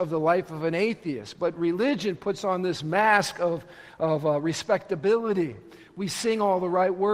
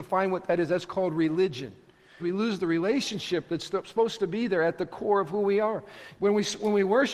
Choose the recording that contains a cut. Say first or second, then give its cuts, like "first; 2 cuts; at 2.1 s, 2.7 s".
second; 2 cuts; at 2.2 s, 6.1 s